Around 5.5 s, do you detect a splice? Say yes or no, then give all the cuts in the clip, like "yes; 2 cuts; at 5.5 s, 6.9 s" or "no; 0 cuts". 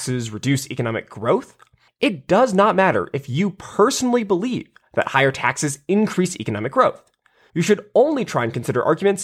no; 2 cuts; at 1.9 s, 7.5 s